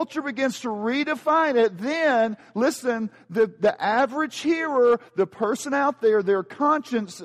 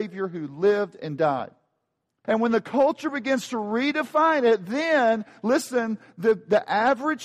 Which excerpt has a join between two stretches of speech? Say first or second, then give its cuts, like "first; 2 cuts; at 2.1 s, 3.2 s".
second; 1 cut; at 2.2 s